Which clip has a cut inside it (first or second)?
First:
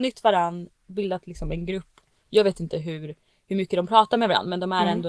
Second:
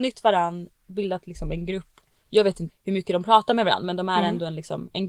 second